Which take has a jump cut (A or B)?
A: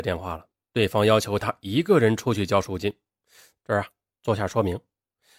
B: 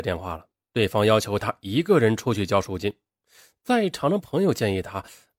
A